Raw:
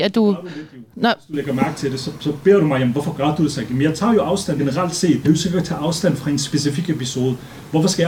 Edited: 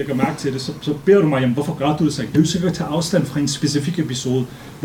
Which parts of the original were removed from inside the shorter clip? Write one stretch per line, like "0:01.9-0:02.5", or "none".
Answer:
0:03.7-0:05.2